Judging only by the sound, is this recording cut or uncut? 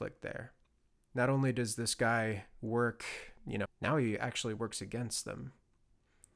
cut